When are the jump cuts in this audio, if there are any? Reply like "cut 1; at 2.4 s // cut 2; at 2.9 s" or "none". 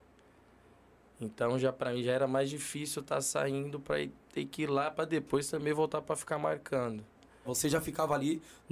cut 1; at 7.4 s